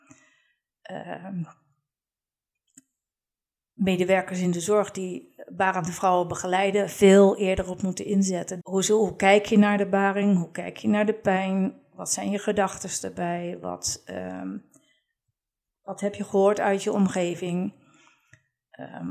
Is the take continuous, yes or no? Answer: no